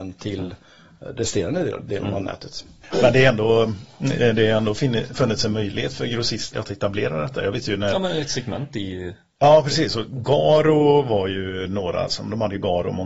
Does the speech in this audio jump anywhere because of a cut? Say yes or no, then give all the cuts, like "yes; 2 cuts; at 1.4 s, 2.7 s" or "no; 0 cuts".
yes; 1 cut; at 6.5 s